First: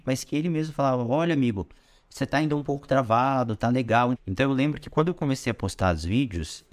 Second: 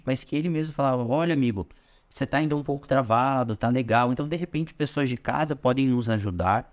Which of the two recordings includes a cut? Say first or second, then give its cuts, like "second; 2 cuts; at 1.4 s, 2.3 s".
first; 1 cut; at 4.1 s